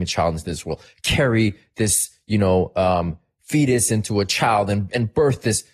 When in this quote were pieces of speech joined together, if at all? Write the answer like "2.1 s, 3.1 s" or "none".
none